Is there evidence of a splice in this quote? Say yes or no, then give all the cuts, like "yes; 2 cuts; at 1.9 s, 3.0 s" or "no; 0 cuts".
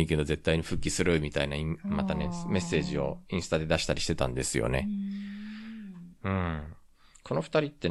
no; 0 cuts